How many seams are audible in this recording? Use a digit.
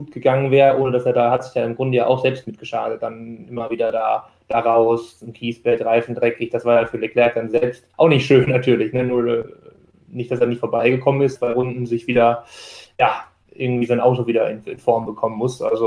2